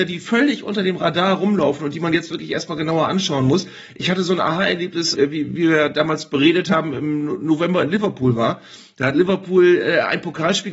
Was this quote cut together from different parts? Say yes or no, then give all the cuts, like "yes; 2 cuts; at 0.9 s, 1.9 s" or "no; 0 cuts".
yes; 1 cut; at 5.1 s